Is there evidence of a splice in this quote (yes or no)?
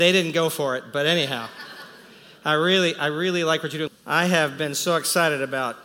yes